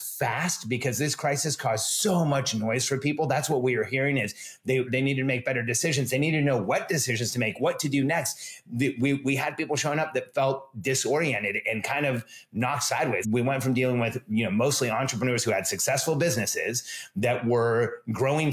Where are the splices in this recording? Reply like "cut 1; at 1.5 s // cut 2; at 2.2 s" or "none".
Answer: cut 1; at 4.9 s // cut 2; at 13.2 s